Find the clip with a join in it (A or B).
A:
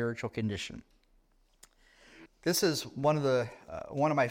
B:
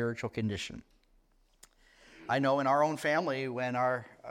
A